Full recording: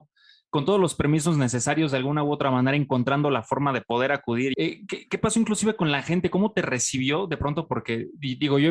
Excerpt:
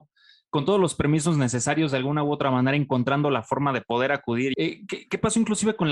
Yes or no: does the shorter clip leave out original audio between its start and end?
no